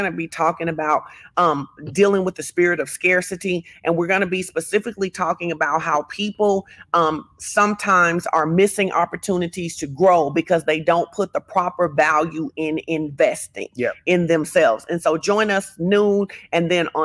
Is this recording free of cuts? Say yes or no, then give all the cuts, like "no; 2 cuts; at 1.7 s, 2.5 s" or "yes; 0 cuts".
yes; 0 cuts